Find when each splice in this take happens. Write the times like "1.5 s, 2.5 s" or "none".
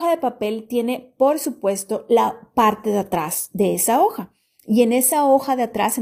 none